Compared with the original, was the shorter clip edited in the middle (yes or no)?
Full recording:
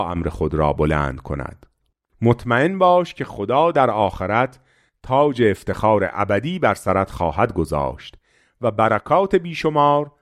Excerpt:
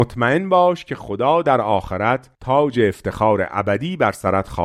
yes